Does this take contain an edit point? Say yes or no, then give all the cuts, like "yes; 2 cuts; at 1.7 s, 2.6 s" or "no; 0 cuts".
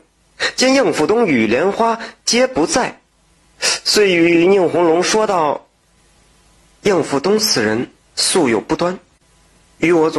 no; 0 cuts